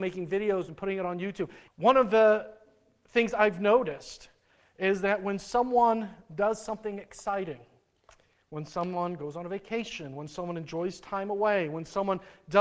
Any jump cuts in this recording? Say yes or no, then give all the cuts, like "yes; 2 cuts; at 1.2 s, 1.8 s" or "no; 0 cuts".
yes; 1 cut; at 1.7 s